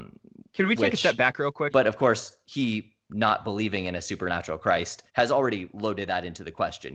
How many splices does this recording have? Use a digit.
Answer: 2